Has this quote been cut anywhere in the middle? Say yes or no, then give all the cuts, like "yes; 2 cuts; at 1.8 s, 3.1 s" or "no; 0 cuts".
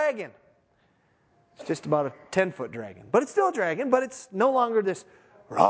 no; 0 cuts